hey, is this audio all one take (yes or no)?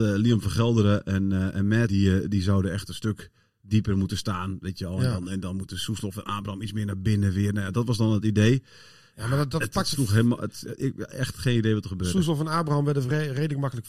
no